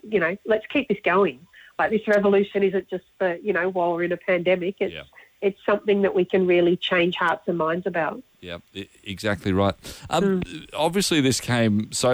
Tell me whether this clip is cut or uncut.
uncut